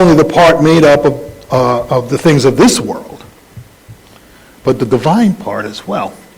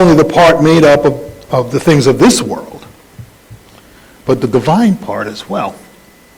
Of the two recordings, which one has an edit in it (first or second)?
second